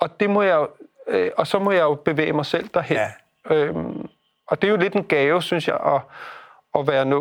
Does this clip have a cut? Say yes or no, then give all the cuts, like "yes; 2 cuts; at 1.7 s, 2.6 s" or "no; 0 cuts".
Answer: no; 0 cuts